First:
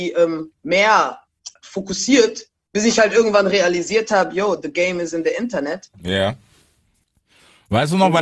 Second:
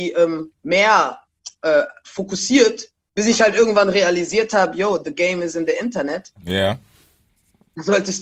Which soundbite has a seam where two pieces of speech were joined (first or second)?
first